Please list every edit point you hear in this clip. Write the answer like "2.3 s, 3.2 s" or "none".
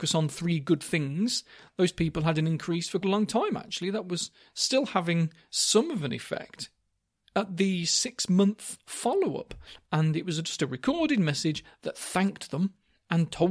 3.0 s, 9.8 s